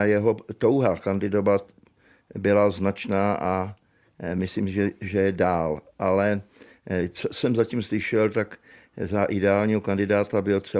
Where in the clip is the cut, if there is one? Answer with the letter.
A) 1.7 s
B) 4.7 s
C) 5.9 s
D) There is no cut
D